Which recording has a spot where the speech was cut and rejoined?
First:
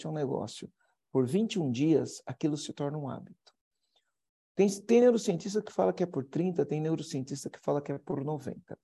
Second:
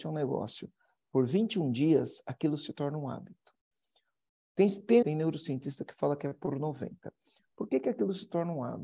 second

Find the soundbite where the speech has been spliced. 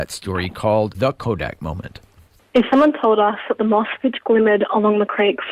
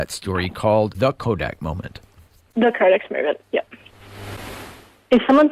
first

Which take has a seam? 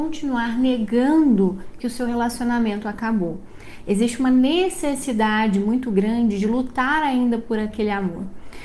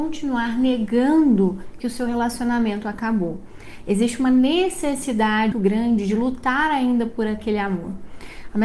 second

